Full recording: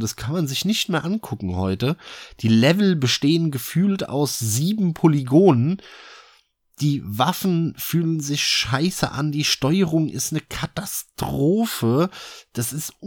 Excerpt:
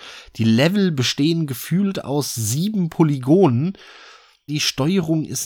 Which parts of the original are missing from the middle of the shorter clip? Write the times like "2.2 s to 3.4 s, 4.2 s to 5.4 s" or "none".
6.5 s to 9.3 s